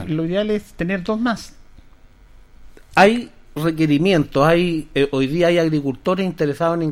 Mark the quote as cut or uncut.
uncut